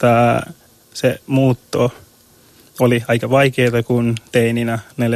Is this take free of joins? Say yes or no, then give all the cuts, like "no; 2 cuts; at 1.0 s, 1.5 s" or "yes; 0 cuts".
yes; 0 cuts